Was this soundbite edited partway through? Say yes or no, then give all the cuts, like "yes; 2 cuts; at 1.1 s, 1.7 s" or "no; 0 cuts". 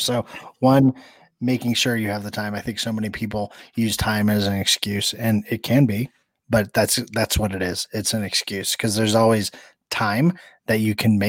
no; 0 cuts